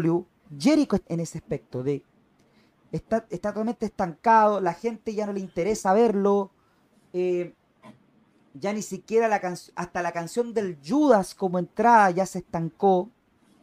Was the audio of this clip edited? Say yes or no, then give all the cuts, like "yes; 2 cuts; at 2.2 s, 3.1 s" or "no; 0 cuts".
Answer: yes; 1 cut; at 1.1 s